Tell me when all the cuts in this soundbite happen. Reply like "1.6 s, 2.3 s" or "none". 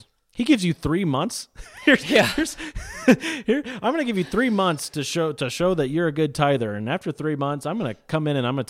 none

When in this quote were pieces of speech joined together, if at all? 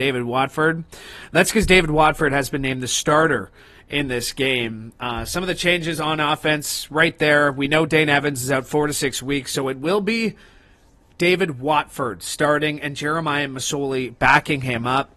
none

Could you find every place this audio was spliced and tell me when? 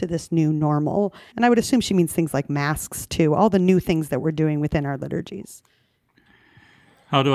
1.3 s

